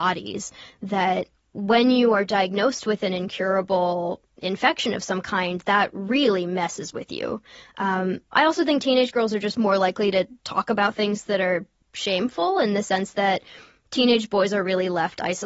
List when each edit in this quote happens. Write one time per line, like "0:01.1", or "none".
none